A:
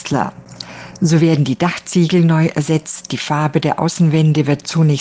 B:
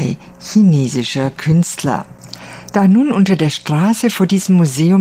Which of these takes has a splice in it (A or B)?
A